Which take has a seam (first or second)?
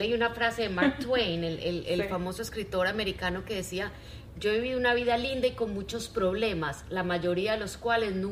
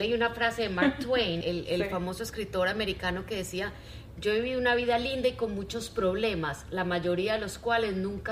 second